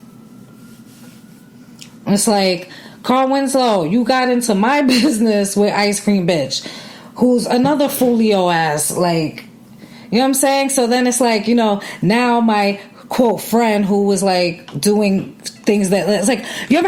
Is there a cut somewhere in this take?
no; 0 cuts

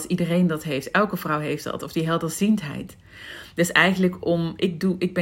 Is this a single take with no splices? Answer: yes; 0 cuts

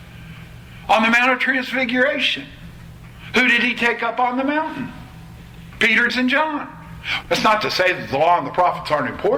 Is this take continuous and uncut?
no; 2 cuts; at 6.1 s, 7.2 s

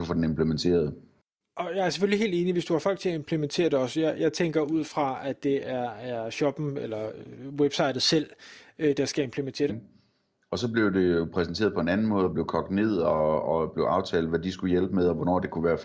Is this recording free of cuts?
no; 1 cut; at 9.7 s

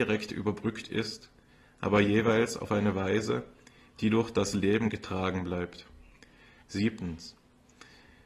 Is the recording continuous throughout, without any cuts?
no; 1 cut; at 6.6 s

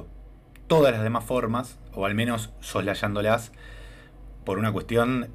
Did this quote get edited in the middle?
no; 0 cuts

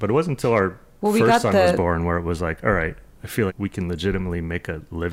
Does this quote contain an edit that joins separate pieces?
yes; 1 cut; at 3.5 s

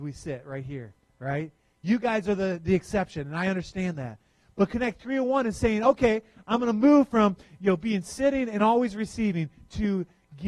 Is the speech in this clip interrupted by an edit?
no; 0 cuts

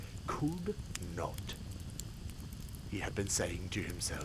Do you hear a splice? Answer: no; 0 cuts

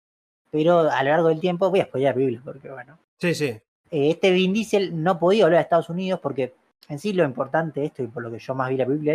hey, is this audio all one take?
no; 1 cut; at 3.8 s

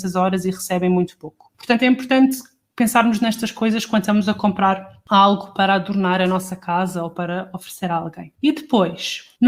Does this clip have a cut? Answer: no; 0 cuts

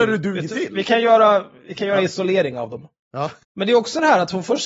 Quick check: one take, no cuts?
no; 1 cut; at 3.4 s

